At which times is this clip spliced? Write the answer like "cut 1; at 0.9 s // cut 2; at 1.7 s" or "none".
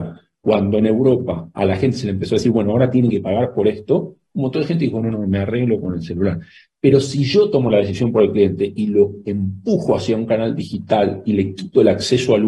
cut 1; at 5.0 s